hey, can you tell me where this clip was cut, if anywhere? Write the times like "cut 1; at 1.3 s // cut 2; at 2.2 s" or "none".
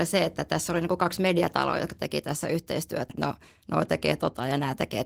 cut 1; at 3.1 s

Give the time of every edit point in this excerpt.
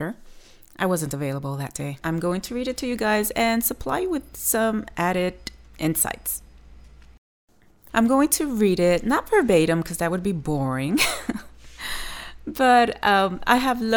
cut 1; at 2.0 s // cut 2; at 7.9 s

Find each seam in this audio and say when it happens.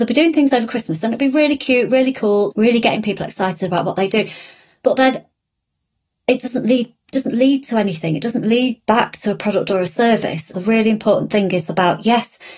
cut 1; at 2.5 s // cut 2; at 10.5 s

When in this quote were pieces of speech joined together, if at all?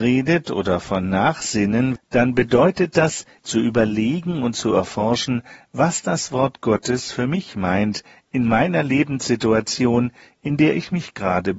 cut 1; at 2.0 s // cut 2; at 3.4 s

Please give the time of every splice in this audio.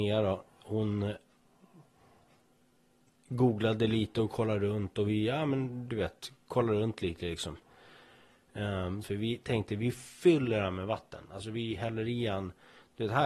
cut 1; at 9.0 s

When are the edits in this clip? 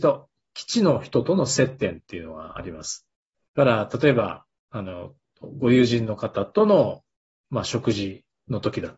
none

